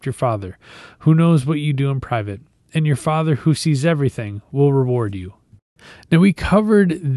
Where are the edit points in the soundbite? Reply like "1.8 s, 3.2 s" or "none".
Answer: none